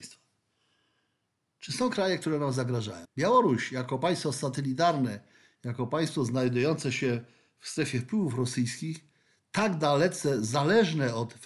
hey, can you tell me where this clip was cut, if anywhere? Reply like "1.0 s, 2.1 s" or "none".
3.0 s